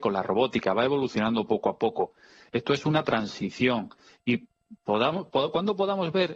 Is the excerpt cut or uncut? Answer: uncut